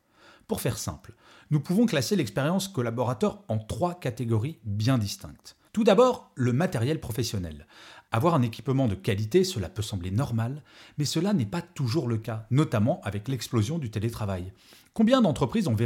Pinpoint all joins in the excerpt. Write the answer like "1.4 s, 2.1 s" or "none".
5.7 s